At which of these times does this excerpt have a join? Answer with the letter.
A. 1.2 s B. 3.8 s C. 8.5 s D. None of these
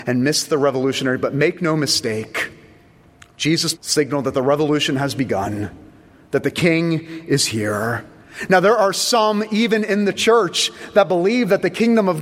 B